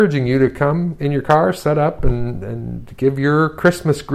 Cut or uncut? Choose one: uncut